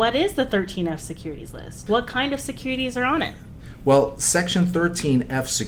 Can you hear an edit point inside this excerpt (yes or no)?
no